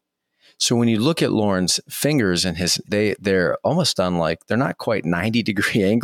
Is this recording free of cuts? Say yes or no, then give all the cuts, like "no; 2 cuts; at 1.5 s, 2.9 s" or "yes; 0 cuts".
no; 1 cut; at 2.8 s